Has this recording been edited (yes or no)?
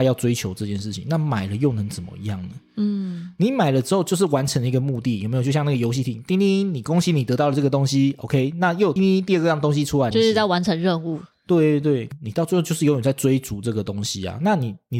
yes